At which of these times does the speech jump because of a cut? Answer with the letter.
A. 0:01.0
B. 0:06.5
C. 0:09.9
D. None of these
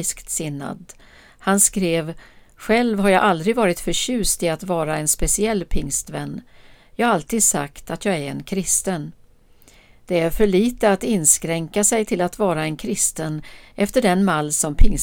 D